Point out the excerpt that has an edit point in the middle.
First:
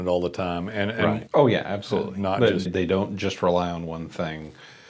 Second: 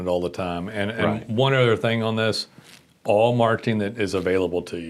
first; 2 cuts; at 1.3 s, 2.7 s

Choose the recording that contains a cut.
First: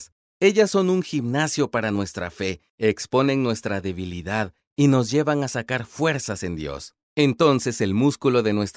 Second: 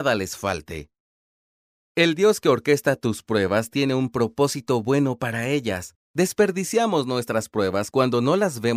second; 1 cut; at 6.0 s

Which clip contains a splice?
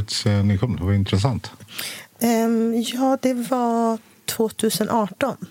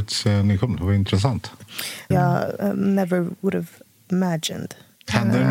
second; 1 cut; at 2.1 s

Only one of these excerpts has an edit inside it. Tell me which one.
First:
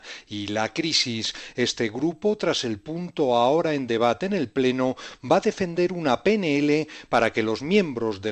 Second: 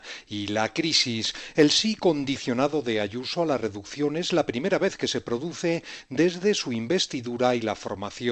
first; 1 cut; at 1.5 s

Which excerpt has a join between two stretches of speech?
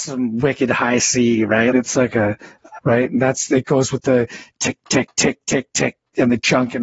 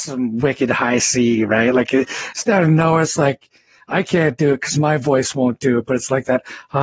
first; 2 cuts; at 1.7 s, 2.8 s

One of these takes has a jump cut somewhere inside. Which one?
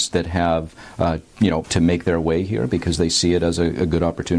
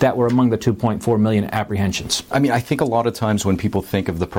first; 1 cut; at 1.6 s

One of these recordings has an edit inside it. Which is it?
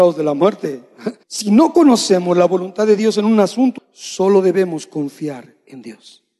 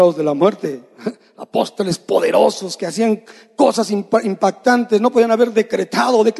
first; 2 cuts; at 1.2 s, 3.8 s

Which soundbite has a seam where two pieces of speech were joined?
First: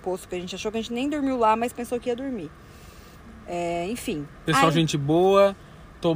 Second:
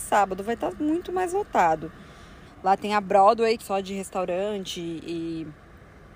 second; 2 cuts; at 2.4 s, 3.6 s

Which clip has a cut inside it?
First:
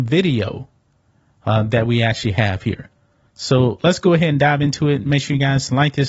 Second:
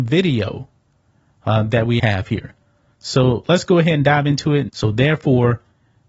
second; 2 cuts; at 2.0 s, 4.7 s

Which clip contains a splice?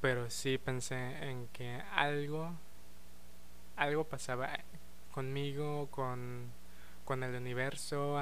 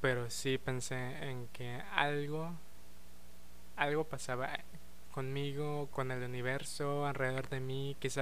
second; 1 cut; at 5.9 s

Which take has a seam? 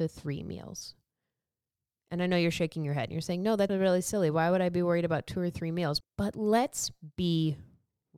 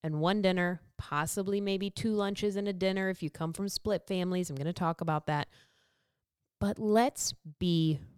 first; 2 cuts; at 3.7 s, 6.0 s

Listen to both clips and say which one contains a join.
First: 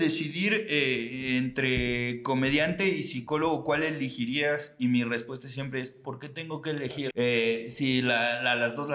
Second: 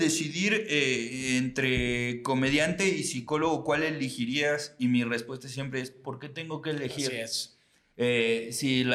first; 1 cut; at 7.1 s

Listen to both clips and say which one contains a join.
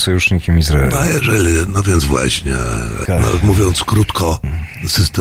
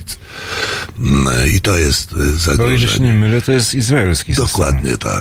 first; 1 cut; at 3.1 s

